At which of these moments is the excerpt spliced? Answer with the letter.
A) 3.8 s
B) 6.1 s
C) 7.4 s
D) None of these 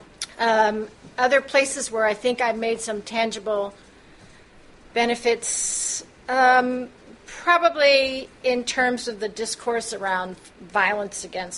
D